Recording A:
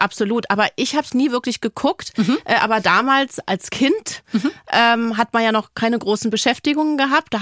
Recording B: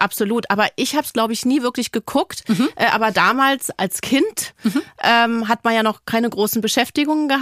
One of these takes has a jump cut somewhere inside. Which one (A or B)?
A